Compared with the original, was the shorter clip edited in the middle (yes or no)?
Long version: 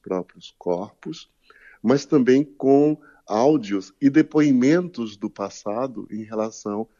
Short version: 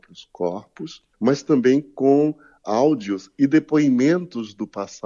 yes